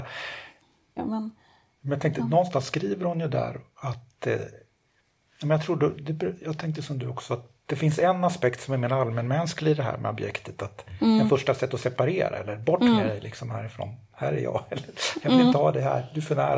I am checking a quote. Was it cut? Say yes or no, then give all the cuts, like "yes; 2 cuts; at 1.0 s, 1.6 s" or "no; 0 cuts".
yes; 1 cut; at 1.0 s